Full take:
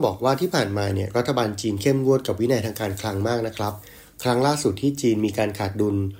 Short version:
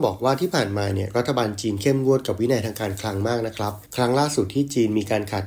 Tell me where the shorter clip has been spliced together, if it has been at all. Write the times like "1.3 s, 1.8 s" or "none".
3.9 s